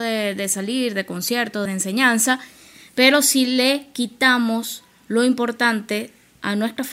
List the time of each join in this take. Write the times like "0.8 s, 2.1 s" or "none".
1.7 s

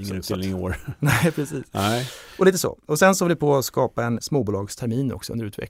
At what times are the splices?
4.2 s

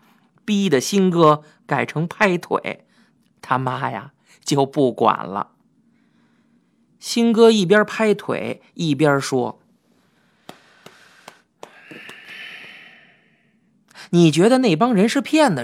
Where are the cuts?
none

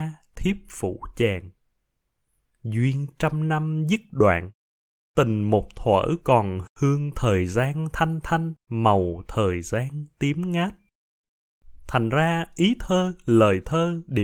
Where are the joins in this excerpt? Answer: 6.7 s, 8.6 s

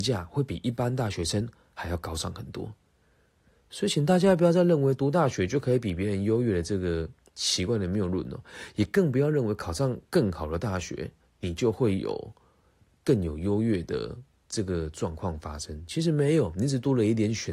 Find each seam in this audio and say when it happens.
none

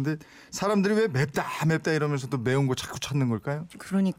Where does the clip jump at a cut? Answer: none

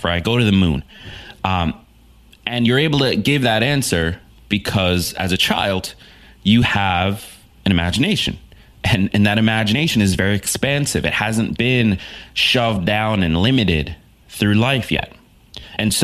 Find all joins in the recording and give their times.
none

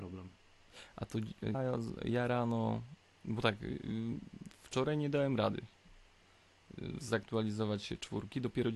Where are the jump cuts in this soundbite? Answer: 1.5 s

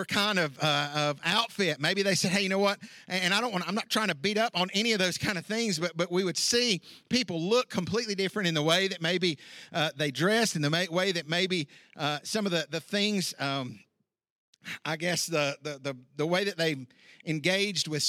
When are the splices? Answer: none

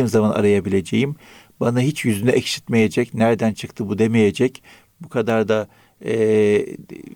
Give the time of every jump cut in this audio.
4.9 s

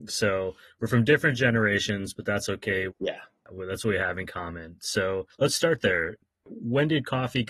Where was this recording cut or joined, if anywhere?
2.9 s

